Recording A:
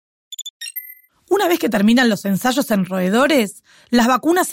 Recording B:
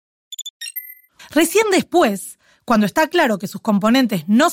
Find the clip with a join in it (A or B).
B